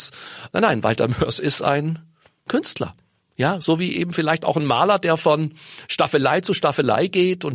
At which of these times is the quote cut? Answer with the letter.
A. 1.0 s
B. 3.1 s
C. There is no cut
C